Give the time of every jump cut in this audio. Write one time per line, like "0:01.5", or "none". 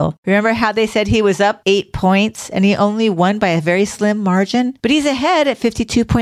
0:01.6
0:04.8